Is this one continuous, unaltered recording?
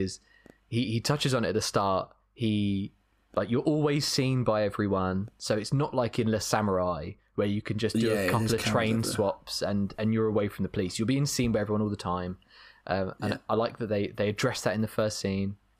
yes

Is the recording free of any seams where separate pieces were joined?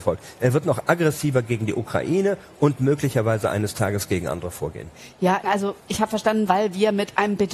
no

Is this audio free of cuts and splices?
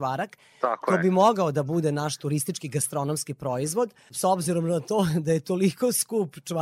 yes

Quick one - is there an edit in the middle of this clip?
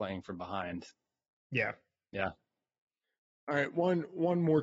no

